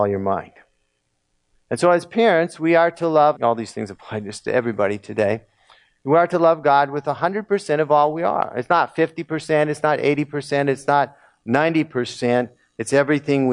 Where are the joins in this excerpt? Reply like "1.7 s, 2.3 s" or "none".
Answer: 3.3 s